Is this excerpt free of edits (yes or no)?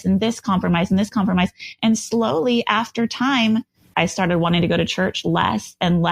no